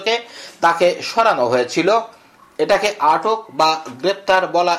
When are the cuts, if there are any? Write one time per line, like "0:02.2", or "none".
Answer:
none